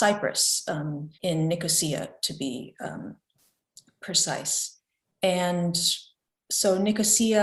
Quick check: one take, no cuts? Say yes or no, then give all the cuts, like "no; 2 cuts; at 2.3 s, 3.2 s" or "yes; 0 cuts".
no; 1 cut; at 1.1 s